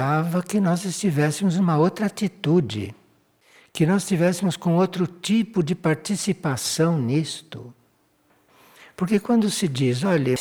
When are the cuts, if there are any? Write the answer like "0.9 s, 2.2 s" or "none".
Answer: none